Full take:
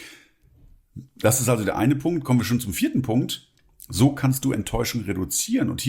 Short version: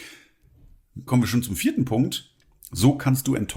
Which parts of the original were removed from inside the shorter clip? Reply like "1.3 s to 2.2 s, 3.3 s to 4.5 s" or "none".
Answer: 1.1 s to 2.2 s